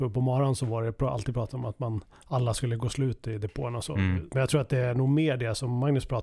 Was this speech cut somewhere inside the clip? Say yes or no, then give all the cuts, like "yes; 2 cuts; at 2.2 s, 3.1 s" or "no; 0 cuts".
yes; 1 cut; at 4.3 s